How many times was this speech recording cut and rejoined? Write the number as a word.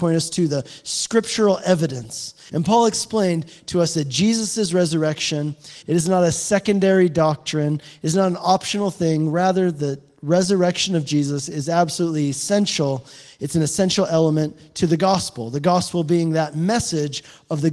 two